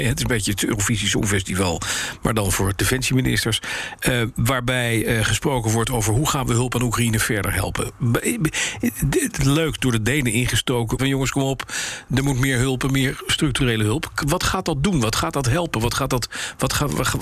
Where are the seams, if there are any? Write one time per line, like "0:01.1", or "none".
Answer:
0:11.0